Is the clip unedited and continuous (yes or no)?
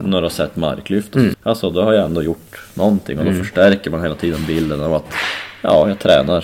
no